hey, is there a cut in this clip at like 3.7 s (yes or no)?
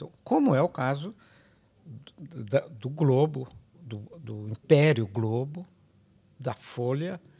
yes